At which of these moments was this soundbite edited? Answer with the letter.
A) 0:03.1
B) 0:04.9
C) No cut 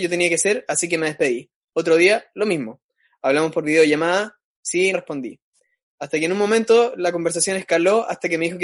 B